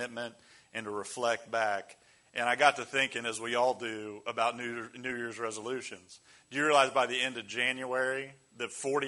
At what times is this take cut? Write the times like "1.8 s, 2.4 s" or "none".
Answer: none